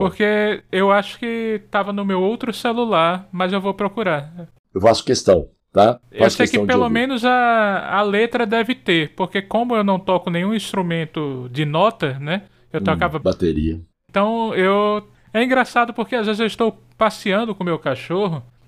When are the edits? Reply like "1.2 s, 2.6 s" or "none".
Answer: 13.2 s